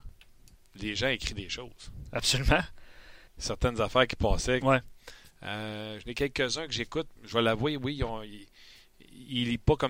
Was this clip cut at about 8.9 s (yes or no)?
no